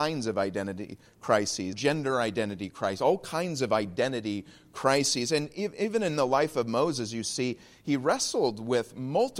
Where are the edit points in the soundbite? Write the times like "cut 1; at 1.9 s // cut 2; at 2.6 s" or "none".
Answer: cut 1; at 1.7 s